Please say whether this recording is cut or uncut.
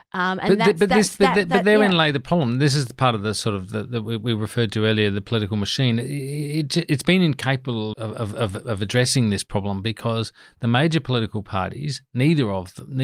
cut